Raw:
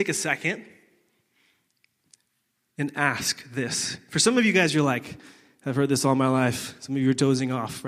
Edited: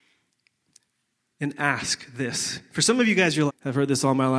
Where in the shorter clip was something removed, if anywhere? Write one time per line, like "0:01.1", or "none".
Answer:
0:03.5